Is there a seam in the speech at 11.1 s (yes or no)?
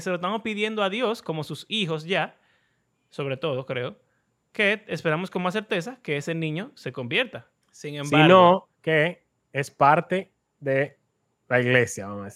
no